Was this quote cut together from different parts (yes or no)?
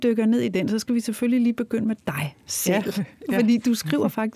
no